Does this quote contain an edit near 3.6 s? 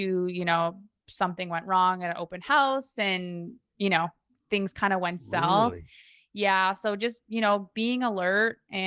no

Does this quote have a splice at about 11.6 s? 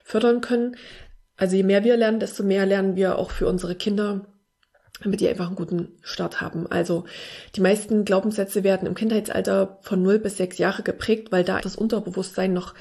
yes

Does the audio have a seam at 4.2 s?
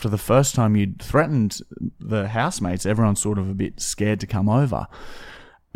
no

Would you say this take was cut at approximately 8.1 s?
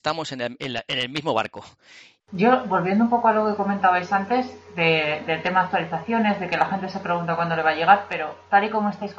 no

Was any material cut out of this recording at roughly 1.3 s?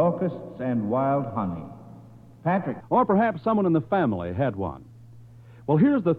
no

